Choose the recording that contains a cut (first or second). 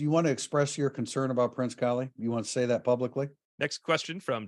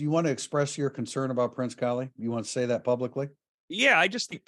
first